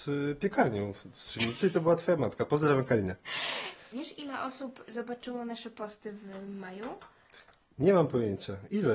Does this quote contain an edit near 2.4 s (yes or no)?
no